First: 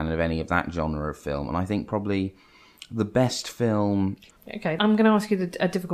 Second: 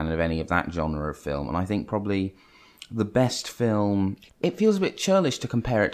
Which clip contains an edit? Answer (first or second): first